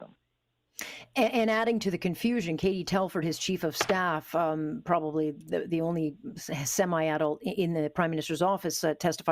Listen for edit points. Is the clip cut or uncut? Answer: uncut